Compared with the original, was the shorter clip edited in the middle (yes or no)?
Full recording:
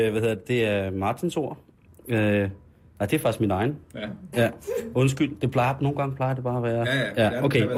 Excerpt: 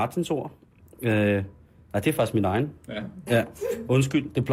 no